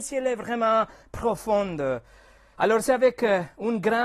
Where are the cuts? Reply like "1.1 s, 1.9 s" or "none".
2.5 s